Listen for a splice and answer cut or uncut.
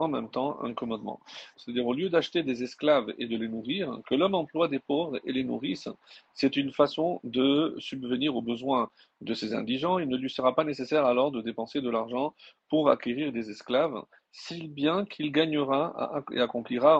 cut